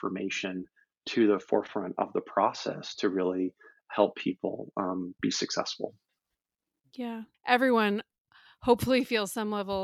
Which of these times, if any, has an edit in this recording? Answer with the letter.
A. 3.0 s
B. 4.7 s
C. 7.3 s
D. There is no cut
C